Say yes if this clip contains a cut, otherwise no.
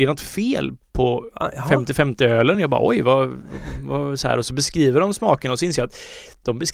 no